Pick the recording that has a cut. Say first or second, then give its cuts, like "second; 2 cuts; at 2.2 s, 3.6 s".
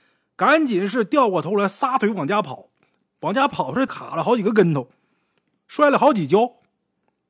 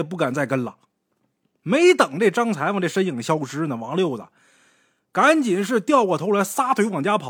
first; 1 cut; at 3.9 s